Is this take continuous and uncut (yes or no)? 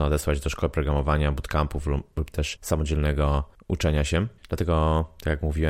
yes